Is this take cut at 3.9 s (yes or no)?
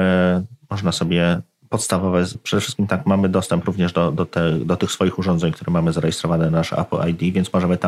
no